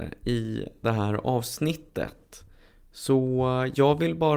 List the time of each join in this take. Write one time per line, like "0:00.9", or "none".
none